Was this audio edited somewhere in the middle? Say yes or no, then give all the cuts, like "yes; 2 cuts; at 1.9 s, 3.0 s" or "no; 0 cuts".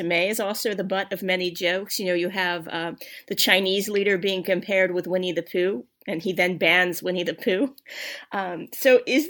no; 0 cuts